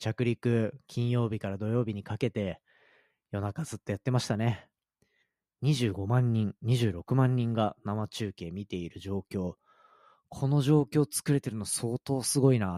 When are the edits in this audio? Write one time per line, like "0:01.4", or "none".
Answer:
none